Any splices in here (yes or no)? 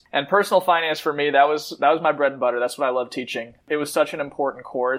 no